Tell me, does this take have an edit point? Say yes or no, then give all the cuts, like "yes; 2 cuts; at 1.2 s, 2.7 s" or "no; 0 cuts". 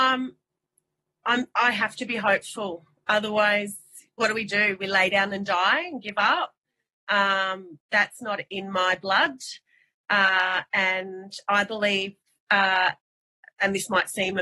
no; 0 cuts